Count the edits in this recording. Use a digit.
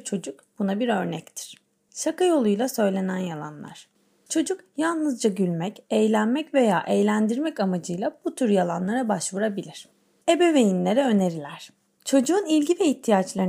0